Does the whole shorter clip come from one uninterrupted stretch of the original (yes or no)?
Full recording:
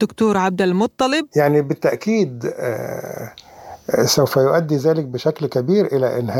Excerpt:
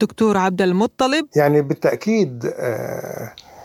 yes